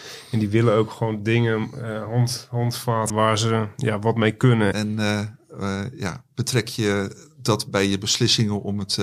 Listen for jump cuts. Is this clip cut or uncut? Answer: cut